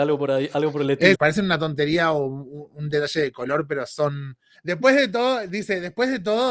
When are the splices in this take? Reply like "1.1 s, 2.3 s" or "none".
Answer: 1.1 s, 4.5 s

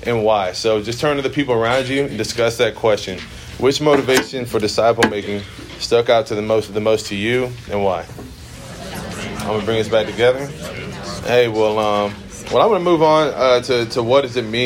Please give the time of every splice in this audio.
11.2 s

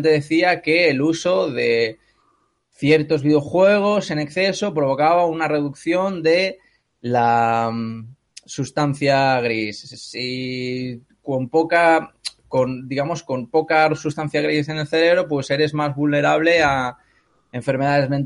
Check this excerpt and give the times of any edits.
none

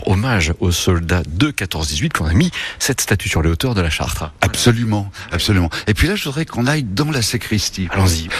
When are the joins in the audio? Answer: none

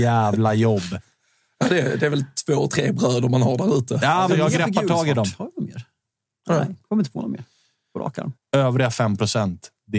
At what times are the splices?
4.3 s, 8.3 s

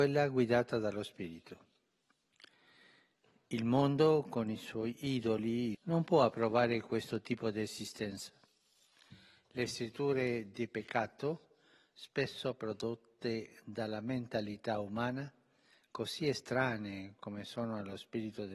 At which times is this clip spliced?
5.7 s

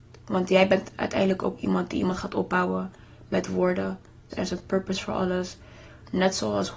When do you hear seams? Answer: 4.3 s

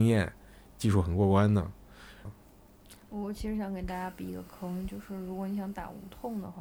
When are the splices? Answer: 2.3 s

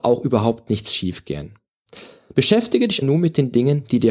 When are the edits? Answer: 3.0 s

